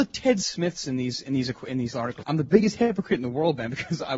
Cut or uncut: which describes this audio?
cut